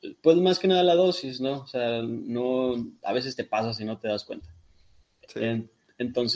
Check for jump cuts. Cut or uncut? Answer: uncut